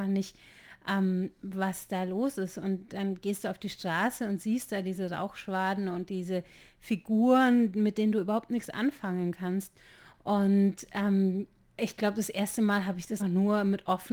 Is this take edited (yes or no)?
yes